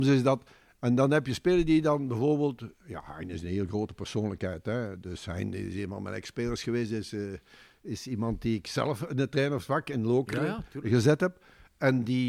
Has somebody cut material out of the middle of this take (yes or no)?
no